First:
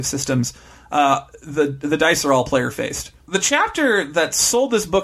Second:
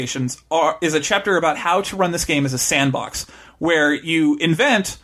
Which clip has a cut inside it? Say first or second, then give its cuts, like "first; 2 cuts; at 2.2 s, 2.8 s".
first; 1 cut; at 3.2 s